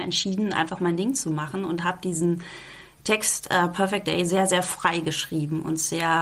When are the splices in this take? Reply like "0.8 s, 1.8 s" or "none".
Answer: none